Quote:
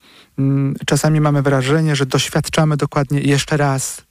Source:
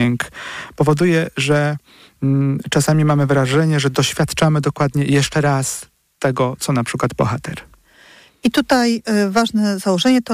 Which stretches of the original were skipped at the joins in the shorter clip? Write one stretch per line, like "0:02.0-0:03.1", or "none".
none